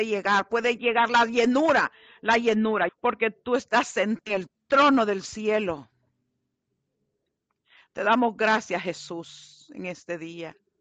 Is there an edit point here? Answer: yes; 1 cut; at 2.9 s

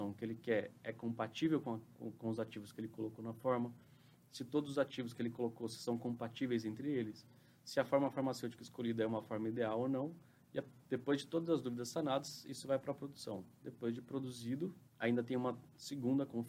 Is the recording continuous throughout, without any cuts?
no; 1 cut; at 14.9 s

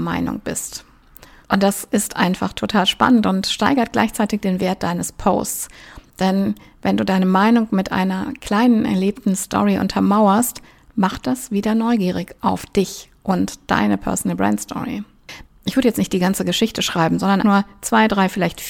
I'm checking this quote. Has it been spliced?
yes; 3 cuts; at 1.4 s, 15.4 s, 17.4 s

